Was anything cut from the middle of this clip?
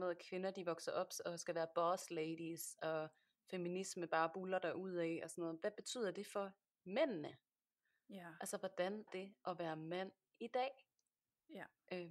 yes; 1 cut; at 9.1 s

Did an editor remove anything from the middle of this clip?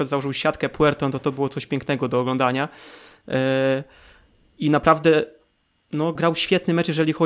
yes; 1 cut; at 6.2 s

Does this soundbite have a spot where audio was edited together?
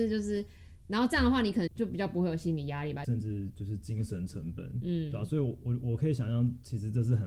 yes; 2 cuts; at 1.7 s, 3.0 s

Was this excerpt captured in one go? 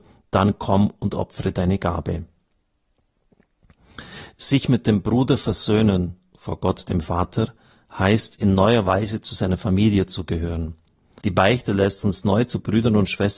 no; 1 cut; at 11.2 s

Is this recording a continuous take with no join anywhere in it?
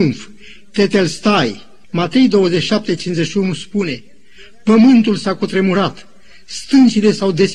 no; 1 cut; at 1.8 s

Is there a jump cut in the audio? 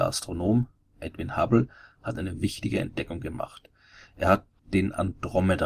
no; 0 cuts

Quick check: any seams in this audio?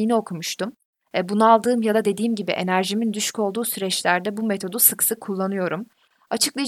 no; 0 cuts

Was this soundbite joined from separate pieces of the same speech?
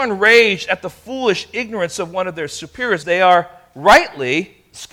yes; 1 cut; at 3.0 s

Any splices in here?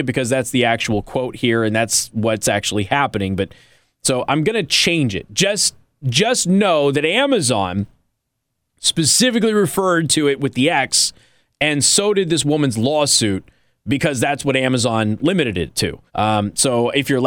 yes; 1 cut; at 16.1 s

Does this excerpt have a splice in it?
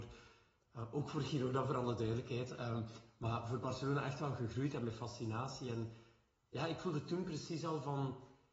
no; 0 cuts

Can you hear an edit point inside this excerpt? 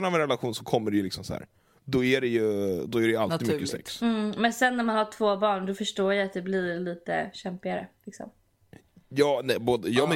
no; 0 cuts

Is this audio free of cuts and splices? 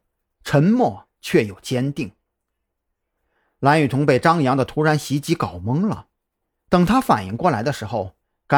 yes; 0 cuts

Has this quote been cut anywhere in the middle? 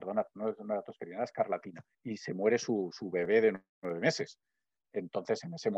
yes; 1 cut; at 1.9 s

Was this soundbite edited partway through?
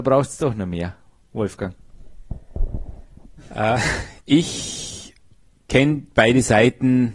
yes; 1 cut; at 4.2 s

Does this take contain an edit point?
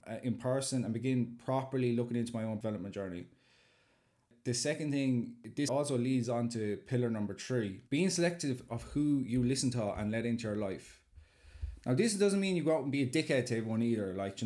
yes; 2 cuts; at 5.7 s, 7.9 s

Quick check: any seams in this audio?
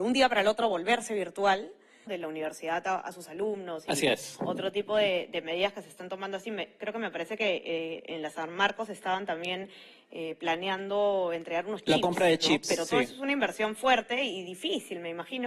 yes; 1 cut; at 2.1 s

